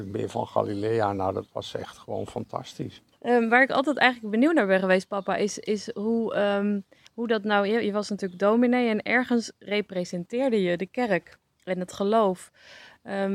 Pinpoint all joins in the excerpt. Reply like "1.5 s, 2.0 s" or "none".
3.1 s